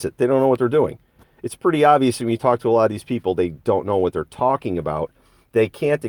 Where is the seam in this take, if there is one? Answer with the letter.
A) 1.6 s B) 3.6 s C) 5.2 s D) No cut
B